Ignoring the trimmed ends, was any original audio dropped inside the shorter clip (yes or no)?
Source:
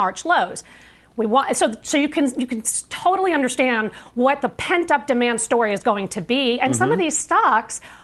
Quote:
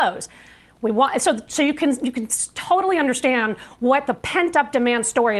no